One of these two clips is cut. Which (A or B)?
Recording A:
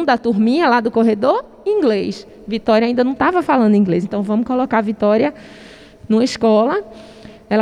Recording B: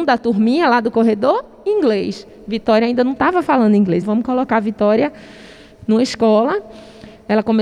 B